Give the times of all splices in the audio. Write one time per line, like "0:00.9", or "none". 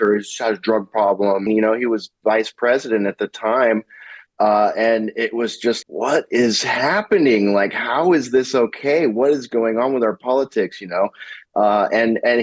0:01.5
0:05.8